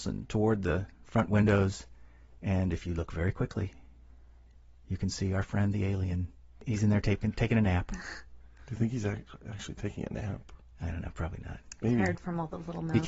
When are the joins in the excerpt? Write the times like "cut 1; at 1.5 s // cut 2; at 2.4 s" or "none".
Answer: none